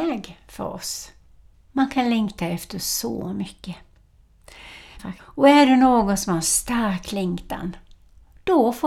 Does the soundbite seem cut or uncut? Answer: cut